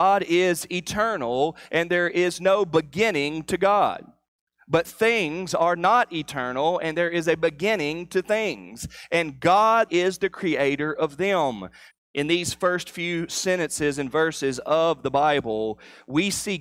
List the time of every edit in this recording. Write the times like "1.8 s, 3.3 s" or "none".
9.9 s, 11.9 s

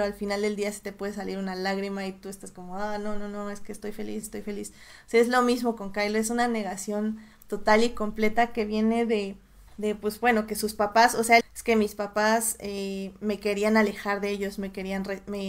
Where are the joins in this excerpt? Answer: 4.2 s, 9.7 s, 11.4 s

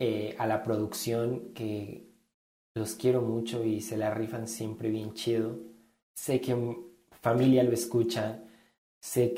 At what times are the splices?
6.0 s

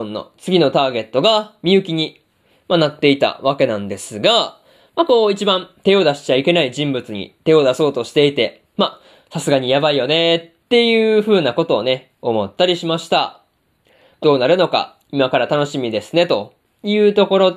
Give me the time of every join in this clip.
14.2 s

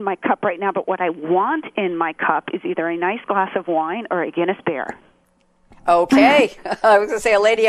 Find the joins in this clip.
none

